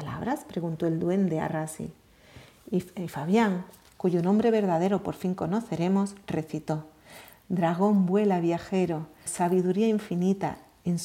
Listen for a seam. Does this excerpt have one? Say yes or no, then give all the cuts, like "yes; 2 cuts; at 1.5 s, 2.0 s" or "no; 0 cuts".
yes; 1 cut; at 9.3 s